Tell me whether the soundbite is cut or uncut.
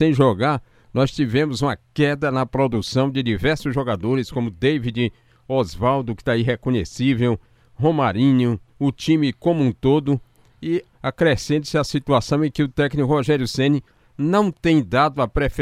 cut